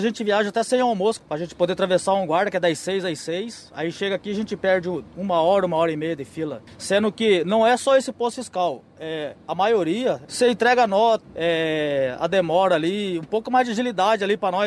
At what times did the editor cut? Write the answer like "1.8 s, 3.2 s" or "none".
1.2 s, 11.2 s